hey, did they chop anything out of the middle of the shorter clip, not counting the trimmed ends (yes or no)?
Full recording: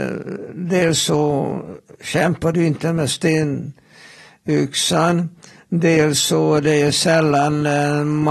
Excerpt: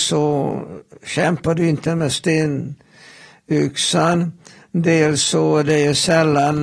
no